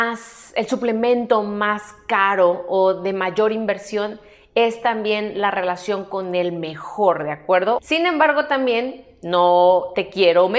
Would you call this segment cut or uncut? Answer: cut